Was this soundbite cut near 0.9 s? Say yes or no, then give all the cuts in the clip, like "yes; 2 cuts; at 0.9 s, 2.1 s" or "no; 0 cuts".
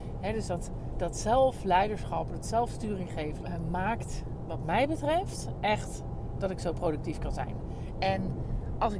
no; 2 cuts; at 3.4 s, 8.0 s